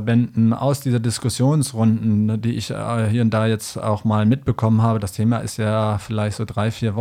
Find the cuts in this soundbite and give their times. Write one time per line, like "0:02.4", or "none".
none

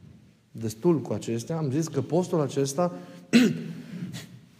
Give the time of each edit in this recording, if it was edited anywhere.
none

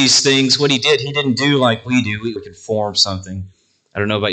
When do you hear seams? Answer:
0:02.4

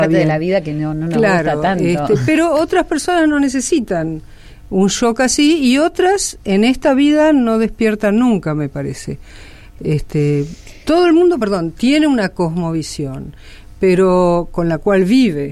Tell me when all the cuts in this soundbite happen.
none

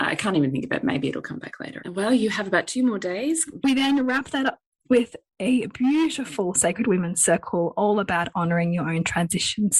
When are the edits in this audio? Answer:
0:01.8
0:03.6

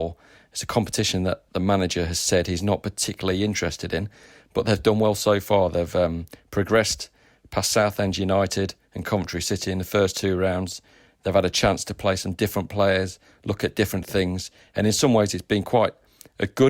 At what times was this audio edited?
none

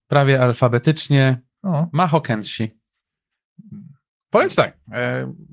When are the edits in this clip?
none

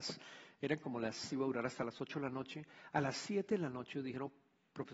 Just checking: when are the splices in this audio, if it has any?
0:01.3

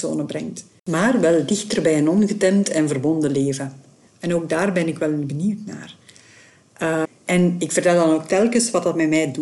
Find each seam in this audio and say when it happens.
0:04.1
0:07.0

